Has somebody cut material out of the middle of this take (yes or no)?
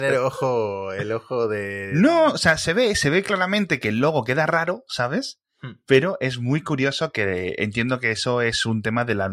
no